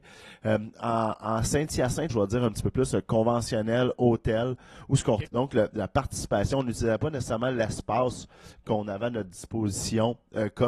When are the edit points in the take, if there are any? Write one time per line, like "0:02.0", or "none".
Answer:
0:02.1
0:05.3